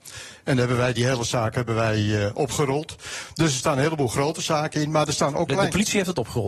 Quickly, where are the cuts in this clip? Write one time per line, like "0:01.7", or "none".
none